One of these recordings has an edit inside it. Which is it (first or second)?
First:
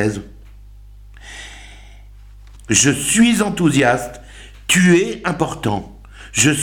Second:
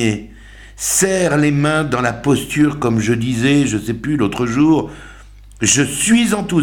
first